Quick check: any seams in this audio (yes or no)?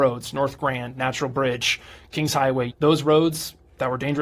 yes